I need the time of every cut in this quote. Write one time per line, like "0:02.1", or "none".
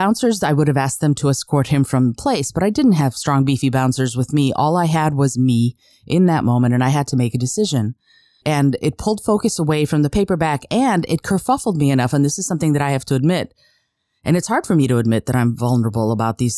0:08.4